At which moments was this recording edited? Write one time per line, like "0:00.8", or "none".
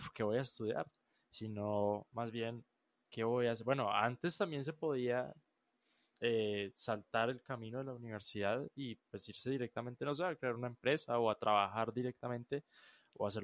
none